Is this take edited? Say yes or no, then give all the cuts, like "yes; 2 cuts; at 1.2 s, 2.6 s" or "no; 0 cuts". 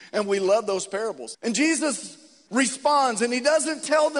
yes; 2 cuts; at 1.3 s, 2.5 s